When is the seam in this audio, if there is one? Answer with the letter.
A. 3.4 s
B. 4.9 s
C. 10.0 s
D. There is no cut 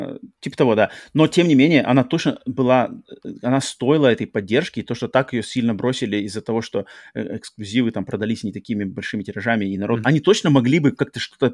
C